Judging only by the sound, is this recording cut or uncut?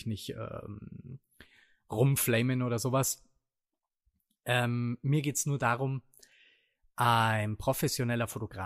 uncut